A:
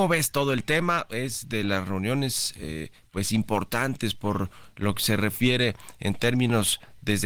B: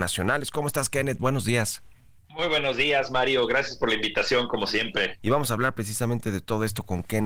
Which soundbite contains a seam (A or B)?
B